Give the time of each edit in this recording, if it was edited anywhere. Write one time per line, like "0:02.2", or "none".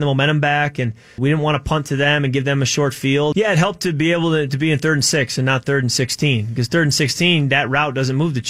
0:01.2
0:03.3